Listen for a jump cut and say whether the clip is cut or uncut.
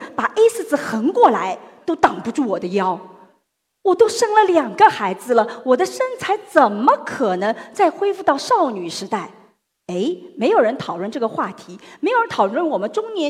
uncut